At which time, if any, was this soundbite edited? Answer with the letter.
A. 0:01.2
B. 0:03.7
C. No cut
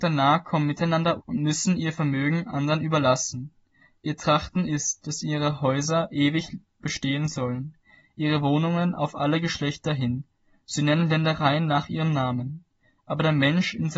A